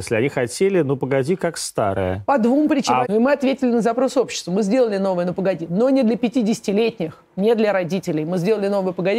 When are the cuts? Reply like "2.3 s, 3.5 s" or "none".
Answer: 3.0 s